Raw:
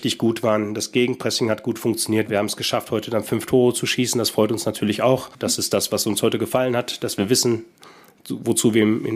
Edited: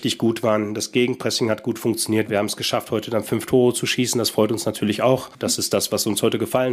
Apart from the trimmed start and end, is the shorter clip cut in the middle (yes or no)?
no